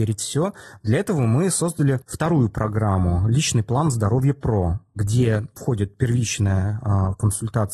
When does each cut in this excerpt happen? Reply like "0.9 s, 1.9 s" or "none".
none